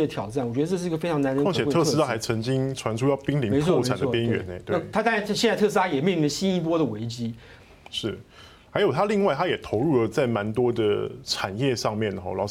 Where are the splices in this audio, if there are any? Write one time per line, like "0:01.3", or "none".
0:07.6